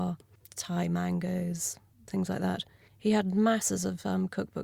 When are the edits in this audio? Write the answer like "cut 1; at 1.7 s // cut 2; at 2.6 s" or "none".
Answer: cut 1; at 2.9 s